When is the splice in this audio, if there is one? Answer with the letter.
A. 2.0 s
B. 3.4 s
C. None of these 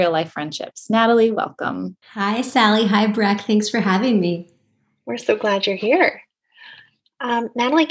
A